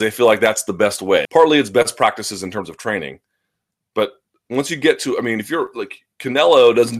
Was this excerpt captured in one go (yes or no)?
no